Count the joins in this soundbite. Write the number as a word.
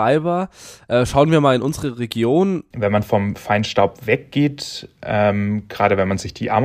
one